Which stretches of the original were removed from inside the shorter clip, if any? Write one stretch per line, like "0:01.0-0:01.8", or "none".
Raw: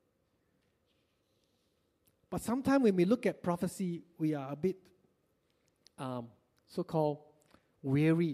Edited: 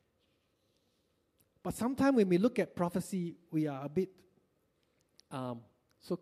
none